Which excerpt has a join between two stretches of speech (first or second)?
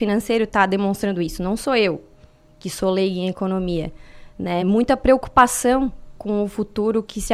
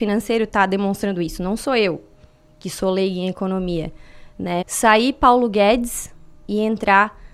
second